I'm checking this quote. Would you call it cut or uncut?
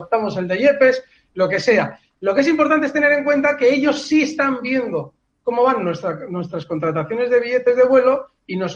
uncut